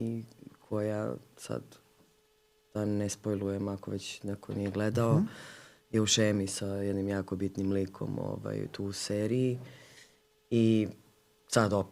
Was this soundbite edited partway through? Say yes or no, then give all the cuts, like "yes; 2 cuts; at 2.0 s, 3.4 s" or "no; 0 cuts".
no; 0 cuts